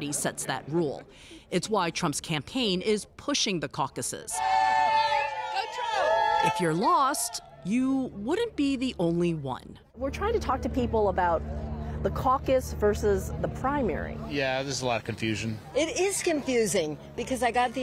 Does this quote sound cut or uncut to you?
uncut